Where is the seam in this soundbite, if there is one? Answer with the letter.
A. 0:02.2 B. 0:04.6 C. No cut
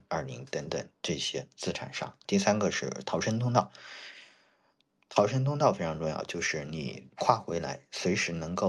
A